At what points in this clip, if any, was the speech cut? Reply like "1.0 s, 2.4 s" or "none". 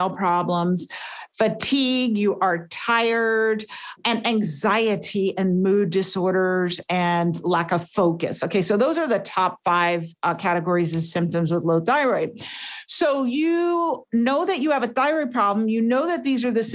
none